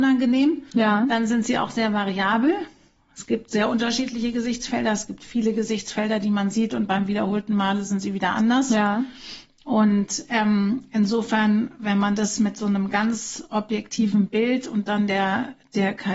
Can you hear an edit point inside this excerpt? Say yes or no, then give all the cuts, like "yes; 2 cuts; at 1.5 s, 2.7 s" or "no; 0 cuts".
no; 0 cuts